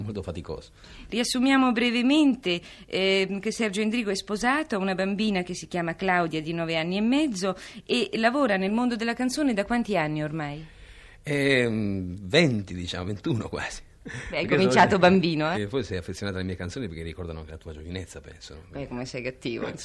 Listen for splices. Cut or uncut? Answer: cut